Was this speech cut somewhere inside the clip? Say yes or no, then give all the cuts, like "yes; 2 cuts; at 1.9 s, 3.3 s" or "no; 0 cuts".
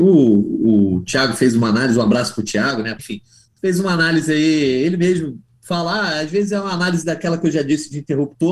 yes; 1 cut; at 3.0 s